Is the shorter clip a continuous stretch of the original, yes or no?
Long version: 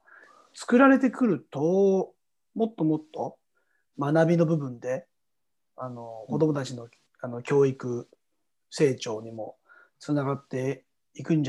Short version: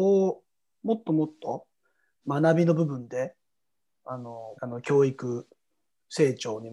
no